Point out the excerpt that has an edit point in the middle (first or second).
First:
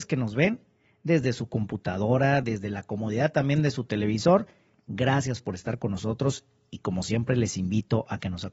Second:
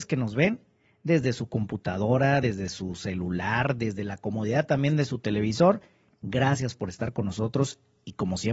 first